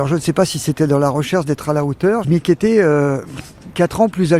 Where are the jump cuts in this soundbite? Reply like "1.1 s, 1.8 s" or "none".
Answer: 2.2 s